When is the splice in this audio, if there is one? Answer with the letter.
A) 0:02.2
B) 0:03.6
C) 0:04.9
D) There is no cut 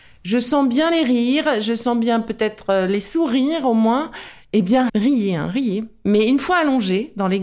C